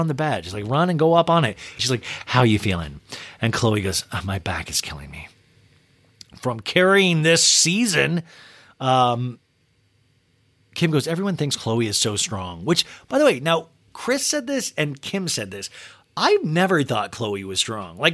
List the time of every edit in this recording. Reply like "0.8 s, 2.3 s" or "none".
1.8 s